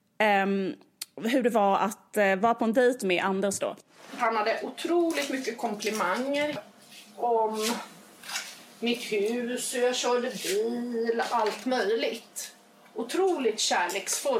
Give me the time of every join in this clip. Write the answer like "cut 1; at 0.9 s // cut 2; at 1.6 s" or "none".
none